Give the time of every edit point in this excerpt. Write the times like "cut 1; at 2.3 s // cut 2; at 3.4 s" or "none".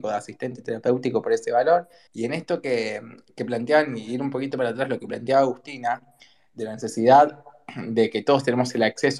cut 1; at 2.1 s

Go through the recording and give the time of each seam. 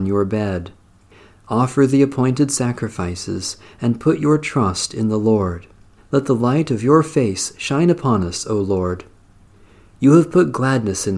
cut 1; at 6.0 s

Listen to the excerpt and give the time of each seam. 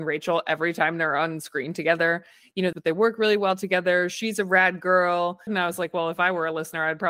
cut 1; at 2.7 s // cut 2; at 5.5 s

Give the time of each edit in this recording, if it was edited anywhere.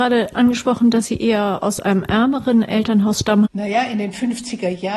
cut 1; at 3.4 s

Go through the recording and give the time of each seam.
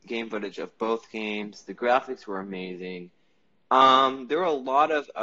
none

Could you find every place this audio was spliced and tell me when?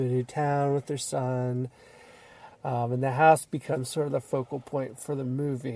cut 1; at 2.5 s

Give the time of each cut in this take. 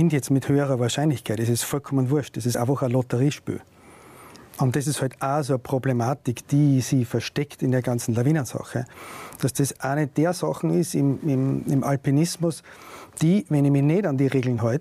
none

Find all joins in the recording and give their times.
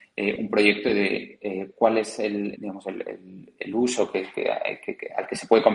cut 1; at 2.6 s

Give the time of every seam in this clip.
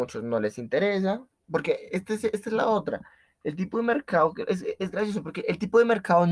none

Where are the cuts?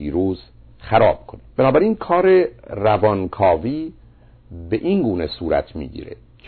cut 1; at 1.5 s

